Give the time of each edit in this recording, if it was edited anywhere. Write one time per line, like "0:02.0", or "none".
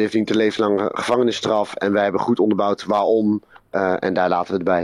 none